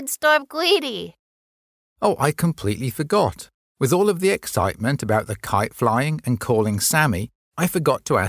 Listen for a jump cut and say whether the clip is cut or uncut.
uncut